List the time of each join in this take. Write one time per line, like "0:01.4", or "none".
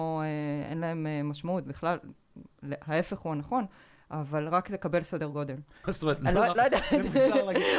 0:05.8